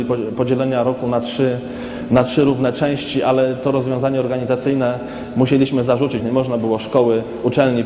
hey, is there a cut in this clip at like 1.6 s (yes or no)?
no